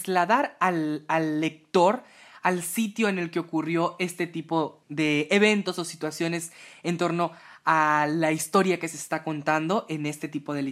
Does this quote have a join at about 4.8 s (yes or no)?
yes